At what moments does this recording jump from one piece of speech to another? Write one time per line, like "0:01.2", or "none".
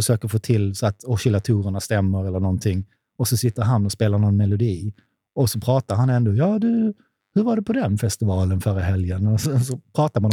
0:09.4